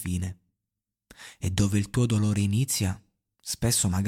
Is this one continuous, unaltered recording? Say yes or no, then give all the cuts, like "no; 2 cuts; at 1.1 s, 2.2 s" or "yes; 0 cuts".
yes; 0 cuts